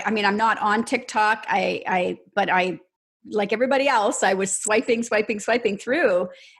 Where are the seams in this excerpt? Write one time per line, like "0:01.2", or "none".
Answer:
none